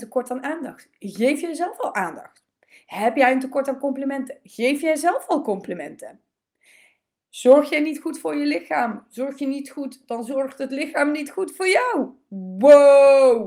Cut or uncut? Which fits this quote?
uncut